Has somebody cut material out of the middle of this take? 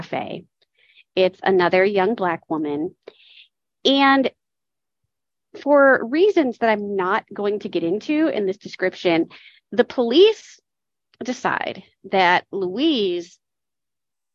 no; 0 cuts

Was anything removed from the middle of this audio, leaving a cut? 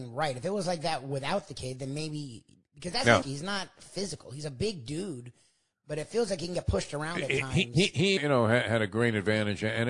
yes; 2 cuts; at 3.2 s, 8.2 s

